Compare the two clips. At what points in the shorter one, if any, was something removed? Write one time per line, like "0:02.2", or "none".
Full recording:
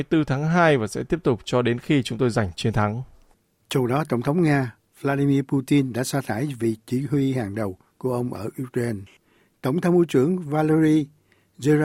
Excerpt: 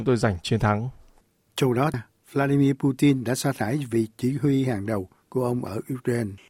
0:01.9